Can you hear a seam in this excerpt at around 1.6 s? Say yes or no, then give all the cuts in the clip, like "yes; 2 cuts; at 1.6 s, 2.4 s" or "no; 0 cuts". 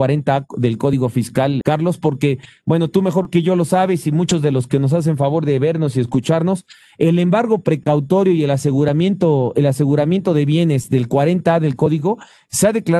yes; 1 cut; at 1.6 s